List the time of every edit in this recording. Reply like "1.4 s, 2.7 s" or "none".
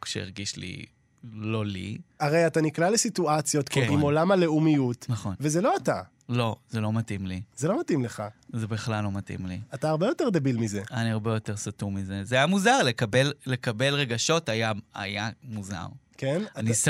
3.9 s